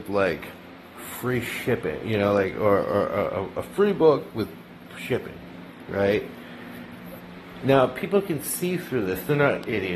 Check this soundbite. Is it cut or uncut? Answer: uncut